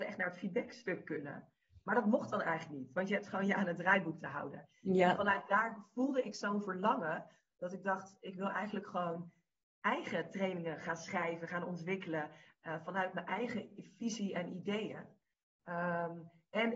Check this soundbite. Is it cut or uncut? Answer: uncut